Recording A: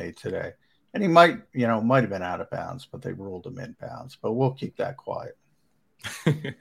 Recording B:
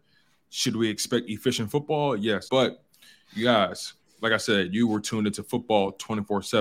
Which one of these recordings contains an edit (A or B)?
B